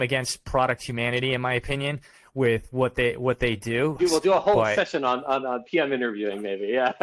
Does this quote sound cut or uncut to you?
cut